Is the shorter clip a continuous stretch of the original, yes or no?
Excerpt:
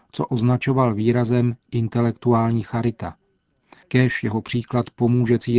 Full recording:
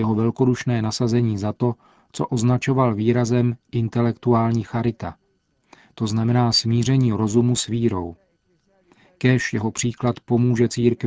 no